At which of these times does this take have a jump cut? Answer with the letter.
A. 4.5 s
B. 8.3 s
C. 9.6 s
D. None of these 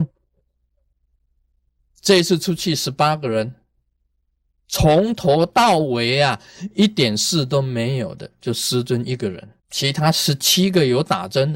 C